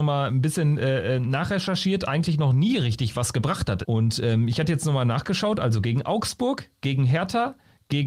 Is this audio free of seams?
no; 1 cut; at 3.8 s

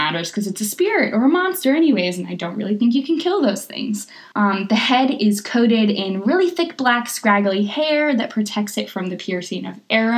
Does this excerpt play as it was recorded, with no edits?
no; 1 cut; at 4.3 s

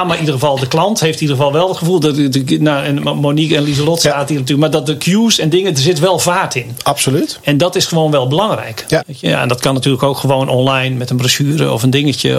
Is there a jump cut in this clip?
yes; 1 cut; at 9.0 s

